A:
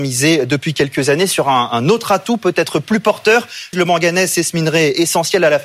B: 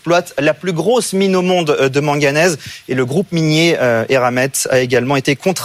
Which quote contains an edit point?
A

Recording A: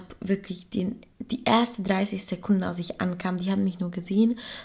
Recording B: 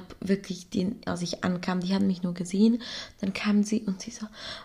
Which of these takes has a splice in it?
B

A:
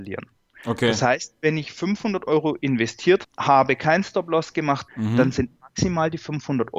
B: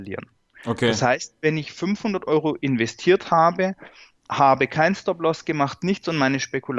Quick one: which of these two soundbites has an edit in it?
A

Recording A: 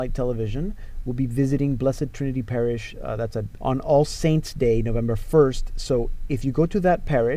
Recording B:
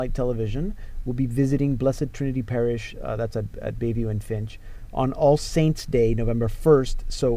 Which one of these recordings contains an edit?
A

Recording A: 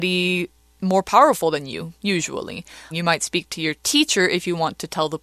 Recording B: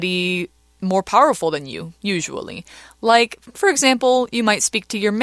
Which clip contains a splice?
A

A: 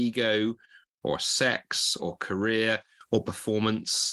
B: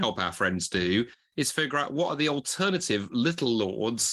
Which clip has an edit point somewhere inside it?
A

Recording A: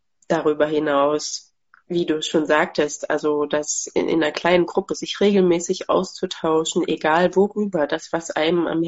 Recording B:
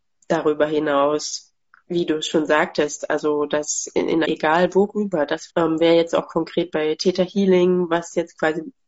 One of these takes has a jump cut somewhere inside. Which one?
B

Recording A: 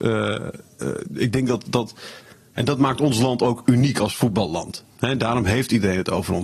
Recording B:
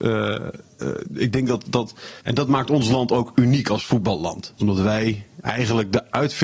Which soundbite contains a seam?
B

